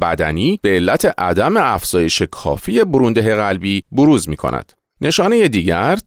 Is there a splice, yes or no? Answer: no